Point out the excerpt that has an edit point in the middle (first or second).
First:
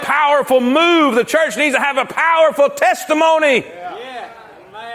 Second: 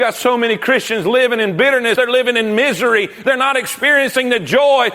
second